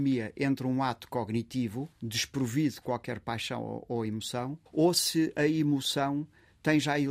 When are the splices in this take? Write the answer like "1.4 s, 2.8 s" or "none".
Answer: 1.9 s, 4.7 s